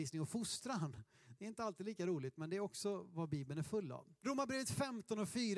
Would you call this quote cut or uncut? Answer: cut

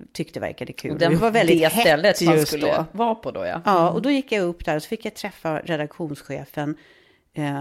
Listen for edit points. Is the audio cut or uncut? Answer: cut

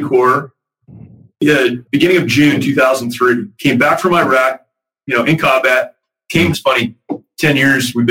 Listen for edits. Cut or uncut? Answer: cut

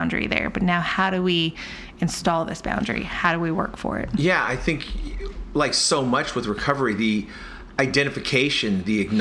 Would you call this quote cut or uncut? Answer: uncut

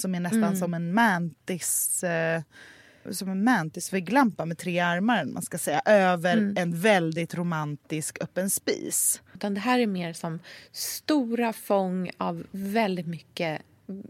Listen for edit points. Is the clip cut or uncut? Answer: cut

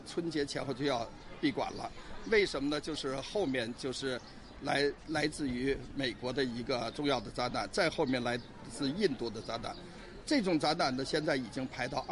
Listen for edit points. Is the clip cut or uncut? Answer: uncut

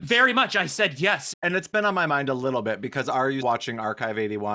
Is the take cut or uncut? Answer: cut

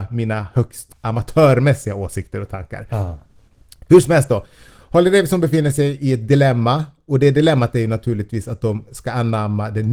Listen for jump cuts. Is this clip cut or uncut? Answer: uncut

